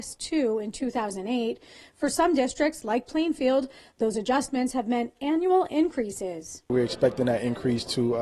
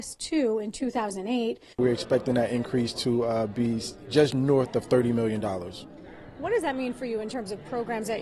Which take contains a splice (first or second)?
second